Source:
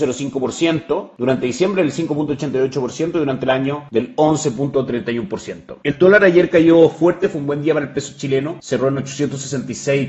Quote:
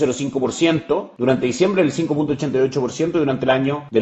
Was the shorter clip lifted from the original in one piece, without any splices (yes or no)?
yes